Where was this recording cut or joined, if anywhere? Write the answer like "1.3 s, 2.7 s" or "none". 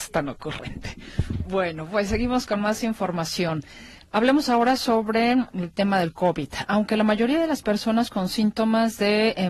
none